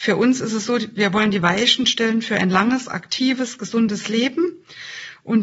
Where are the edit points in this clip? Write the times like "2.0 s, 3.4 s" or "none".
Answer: none